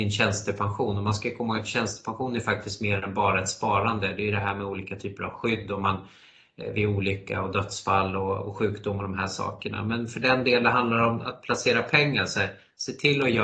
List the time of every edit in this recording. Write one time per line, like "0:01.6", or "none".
none